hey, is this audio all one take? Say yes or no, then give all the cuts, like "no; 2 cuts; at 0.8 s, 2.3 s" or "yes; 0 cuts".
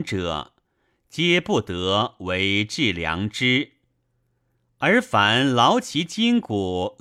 yes; 0 cuts